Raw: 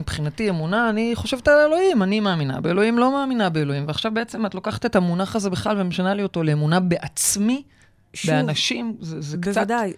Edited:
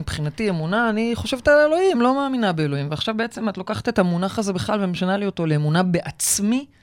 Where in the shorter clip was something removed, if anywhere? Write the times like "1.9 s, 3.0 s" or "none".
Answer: 1.9 s